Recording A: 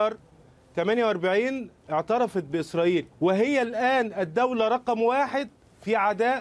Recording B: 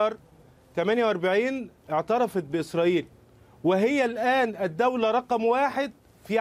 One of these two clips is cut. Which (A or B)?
A